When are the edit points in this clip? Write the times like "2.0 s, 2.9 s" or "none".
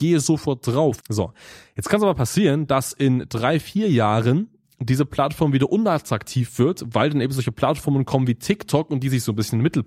1.0 s